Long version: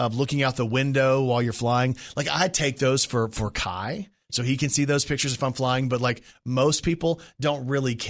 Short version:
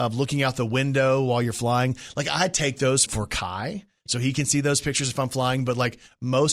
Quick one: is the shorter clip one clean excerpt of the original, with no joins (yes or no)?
no